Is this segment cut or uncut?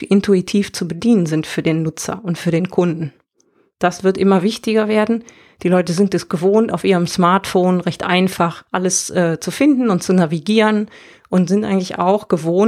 cut